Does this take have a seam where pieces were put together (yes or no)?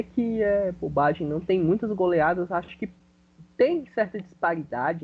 no